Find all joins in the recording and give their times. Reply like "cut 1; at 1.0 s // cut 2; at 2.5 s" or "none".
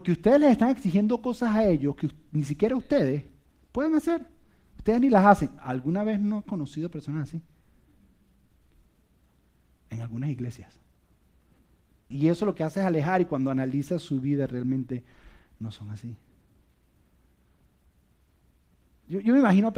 cut 1; at 12.1 s